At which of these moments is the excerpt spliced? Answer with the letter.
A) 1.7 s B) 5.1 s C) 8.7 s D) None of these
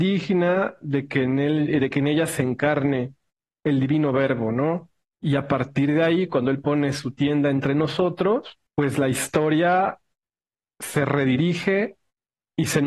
C